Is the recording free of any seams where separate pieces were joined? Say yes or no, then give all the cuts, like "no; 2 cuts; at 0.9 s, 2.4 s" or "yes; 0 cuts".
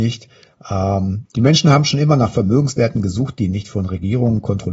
no; 1 cut; at 1.2 s